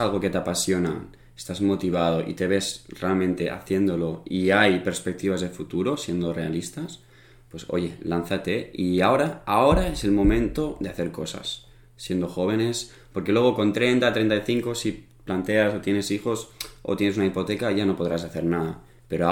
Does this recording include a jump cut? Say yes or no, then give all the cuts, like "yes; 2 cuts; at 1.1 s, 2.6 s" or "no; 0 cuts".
no; 0 cuts